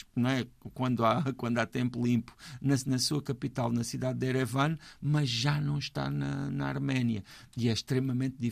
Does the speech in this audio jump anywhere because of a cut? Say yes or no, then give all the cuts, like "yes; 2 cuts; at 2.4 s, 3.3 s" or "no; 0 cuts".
no; 0 cuts